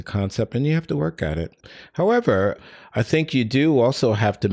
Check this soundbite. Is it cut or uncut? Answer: uncut